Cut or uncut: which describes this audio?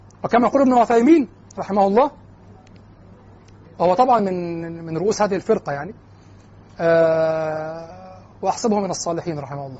uncut